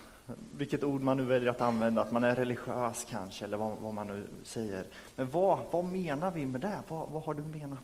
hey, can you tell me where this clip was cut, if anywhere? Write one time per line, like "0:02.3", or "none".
none